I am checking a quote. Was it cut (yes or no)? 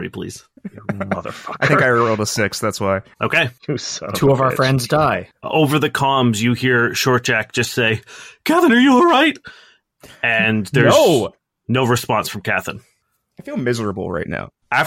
yes